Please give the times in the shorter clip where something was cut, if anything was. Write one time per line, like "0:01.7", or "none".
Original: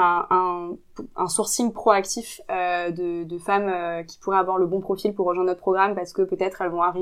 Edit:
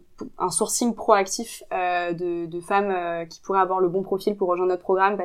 none